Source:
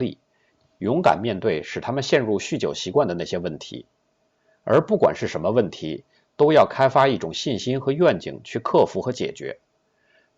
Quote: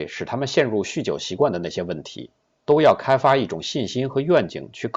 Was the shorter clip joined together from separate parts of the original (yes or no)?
yes